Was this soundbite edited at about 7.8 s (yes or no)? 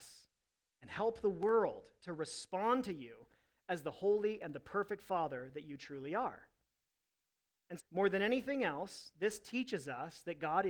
yes